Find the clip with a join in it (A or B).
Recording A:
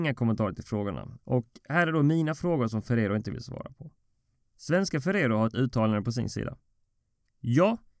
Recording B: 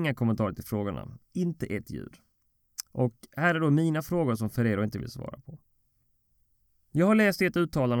A